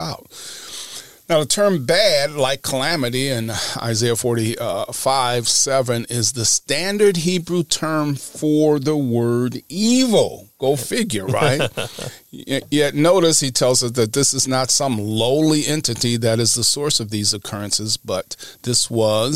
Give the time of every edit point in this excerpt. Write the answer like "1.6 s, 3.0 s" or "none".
none